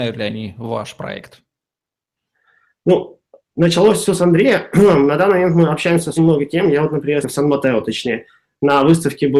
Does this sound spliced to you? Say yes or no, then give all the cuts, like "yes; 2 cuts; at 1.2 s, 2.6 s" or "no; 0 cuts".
yes; 2 cuts; at 6.2 s, 7.2 s